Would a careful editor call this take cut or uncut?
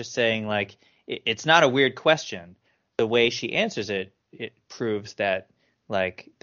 uncut